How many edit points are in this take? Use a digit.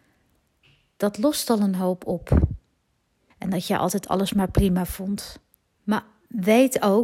2